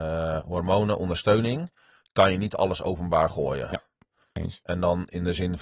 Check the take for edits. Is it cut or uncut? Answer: uncut